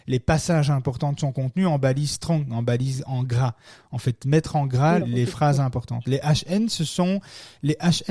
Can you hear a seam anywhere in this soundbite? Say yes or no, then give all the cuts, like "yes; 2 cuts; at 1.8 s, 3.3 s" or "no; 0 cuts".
yes; 1 cut; at 5.0 s